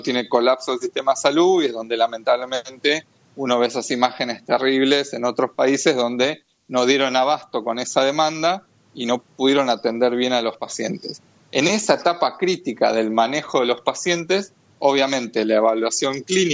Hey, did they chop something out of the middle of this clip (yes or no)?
yes